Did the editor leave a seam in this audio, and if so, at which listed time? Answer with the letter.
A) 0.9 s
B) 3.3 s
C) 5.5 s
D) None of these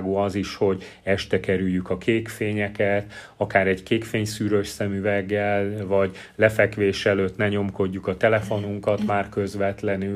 D